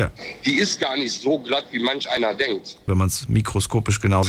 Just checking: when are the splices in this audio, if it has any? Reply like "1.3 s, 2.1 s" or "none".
2.9 s